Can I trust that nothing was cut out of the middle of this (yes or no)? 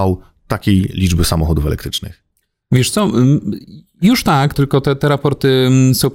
no